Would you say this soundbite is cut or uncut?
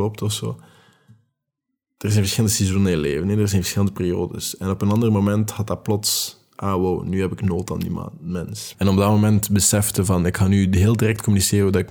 cut